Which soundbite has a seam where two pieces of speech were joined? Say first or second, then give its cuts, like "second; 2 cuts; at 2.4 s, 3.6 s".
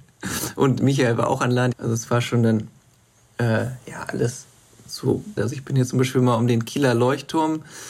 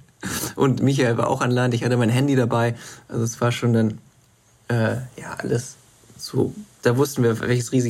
first; 2 cuts; at 1.7 s, 5.4 s